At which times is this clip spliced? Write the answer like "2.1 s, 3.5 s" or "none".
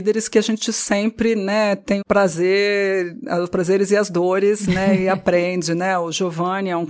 2.0 s